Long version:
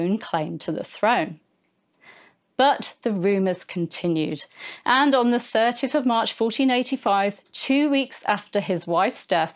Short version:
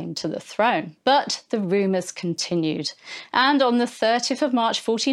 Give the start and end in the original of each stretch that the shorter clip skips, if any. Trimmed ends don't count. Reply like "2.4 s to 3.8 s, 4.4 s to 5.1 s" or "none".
1.4 s to 2.5 s